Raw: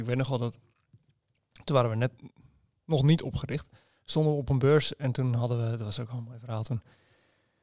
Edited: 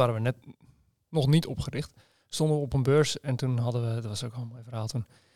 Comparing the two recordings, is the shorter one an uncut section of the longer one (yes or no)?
yes